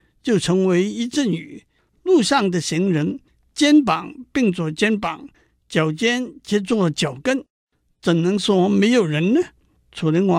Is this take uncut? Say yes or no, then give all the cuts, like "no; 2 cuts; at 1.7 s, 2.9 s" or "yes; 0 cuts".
yes; 0 cuts